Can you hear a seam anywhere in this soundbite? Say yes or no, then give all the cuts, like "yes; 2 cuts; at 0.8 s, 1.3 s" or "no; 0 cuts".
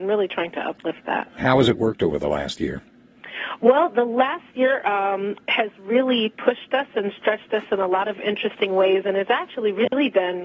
yes; 1 cut; at 1.4 s